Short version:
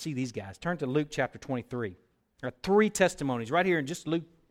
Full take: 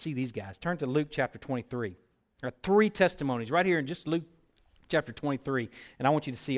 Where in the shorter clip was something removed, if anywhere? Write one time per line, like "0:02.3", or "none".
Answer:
none